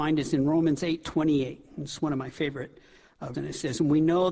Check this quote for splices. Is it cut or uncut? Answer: cut